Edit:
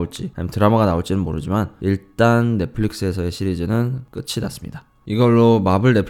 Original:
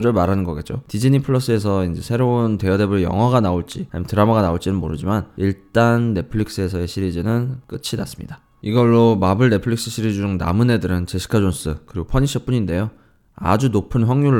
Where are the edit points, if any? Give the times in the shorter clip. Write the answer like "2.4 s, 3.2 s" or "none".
none